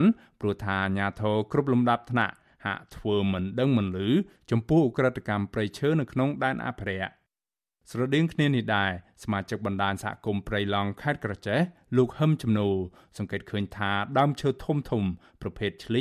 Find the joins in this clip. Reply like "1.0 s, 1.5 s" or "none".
none